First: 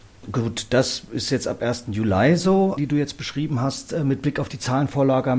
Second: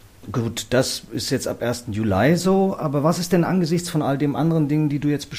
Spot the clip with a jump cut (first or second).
first